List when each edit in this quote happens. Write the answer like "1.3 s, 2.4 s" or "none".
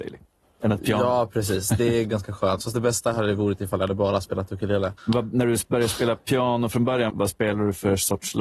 2.0 s, 5.0 s, 7.1 s